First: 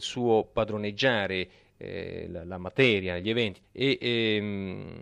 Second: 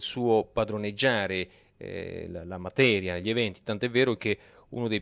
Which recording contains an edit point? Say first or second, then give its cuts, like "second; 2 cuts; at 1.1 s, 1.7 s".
first; 1 cut; at 3.6 s